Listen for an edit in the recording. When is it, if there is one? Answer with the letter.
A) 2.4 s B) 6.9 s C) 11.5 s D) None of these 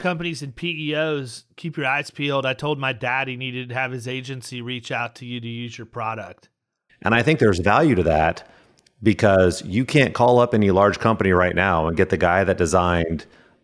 B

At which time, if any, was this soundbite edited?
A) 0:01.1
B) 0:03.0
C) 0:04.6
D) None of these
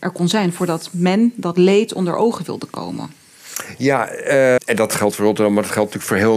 C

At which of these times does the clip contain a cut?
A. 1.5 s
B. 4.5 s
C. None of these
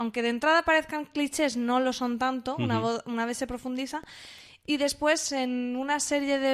C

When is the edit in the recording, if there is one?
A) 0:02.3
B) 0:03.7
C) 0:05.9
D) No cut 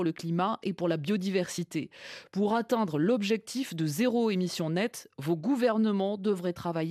D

